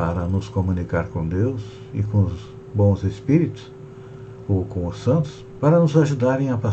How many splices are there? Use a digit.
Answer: 1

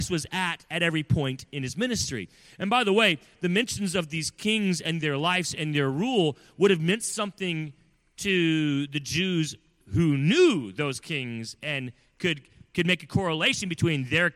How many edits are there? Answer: 0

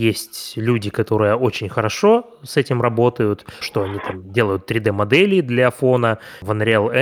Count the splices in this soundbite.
1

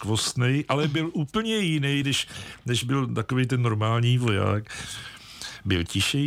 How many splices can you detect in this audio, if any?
0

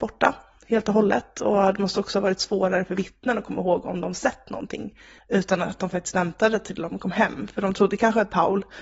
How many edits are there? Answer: 1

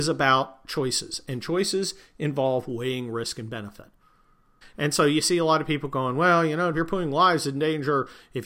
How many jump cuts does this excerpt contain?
2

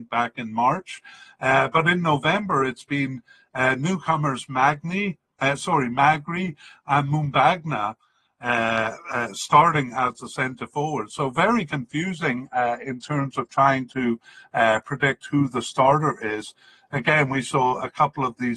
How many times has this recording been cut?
0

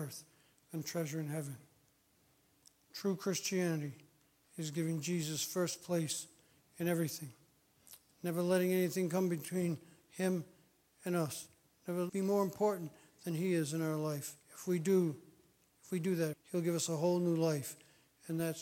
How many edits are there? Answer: 3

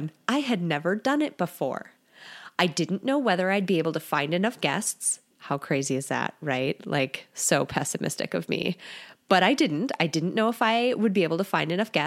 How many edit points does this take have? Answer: 1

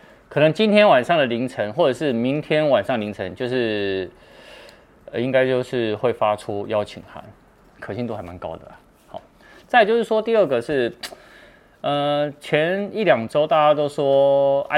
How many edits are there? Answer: 1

